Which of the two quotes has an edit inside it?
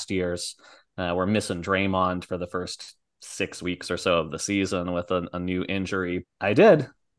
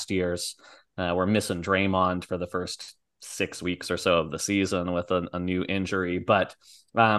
first; 1 cut; at 6.2 s

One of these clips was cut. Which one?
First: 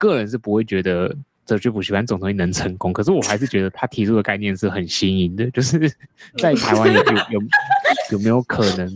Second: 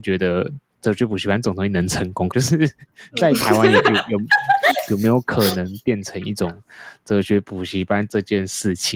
second; 1 cut; at 2.3 s

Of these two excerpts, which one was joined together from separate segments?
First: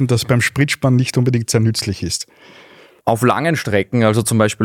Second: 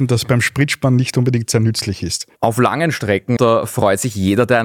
second; 2 cuts; at 2.3 s, 3.4 s

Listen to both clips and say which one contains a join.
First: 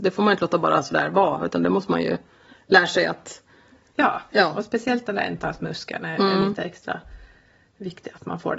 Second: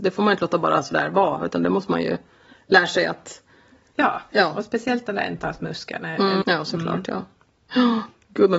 second; 1 cut; at 6.4 s

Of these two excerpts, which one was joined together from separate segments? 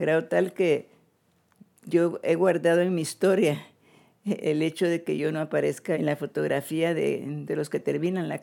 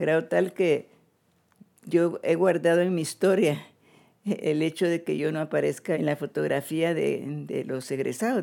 first; 1 cut; at 7.5 s

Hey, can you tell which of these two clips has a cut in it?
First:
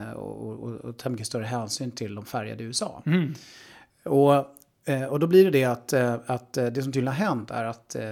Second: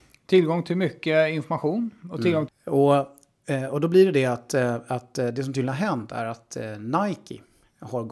second; 1 cut; at 2.5 s

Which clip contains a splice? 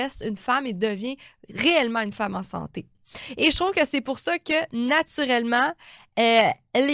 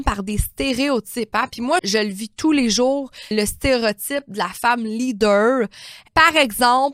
second; 2 cuts; at 1.8 s, 3.3 s

